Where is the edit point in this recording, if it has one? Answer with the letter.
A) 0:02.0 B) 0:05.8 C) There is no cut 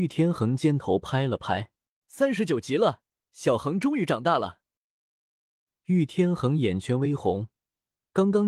A